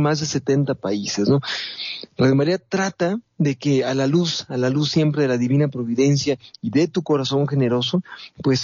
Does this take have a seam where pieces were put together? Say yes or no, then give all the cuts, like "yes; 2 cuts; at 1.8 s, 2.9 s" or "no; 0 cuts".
no; 0 cuts